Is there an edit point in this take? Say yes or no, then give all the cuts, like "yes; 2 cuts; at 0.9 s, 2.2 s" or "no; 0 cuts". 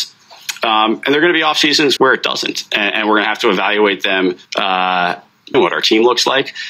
yes; 3 cuts; at 2.0 s, 4.5 s, 5.5 s